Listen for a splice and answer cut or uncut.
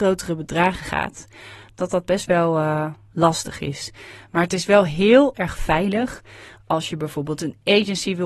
cut